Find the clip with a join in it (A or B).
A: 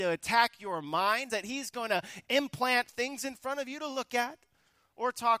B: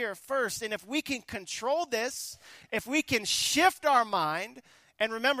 A